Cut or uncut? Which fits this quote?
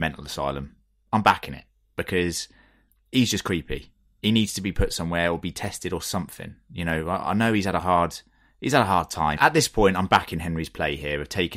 cut